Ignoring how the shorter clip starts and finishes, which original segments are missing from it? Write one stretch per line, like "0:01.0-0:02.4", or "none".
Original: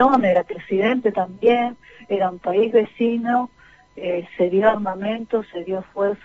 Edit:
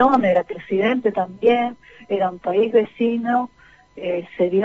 none